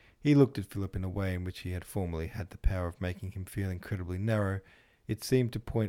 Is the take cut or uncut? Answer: uncut